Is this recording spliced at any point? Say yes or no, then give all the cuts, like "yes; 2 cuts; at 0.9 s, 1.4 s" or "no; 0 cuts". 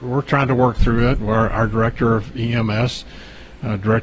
no; 0 cuts